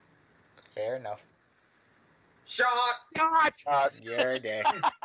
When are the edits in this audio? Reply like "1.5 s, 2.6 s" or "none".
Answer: none